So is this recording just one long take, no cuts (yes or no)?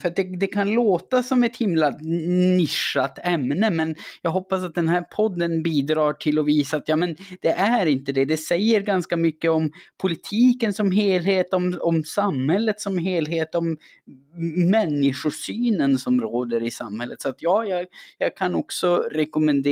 yes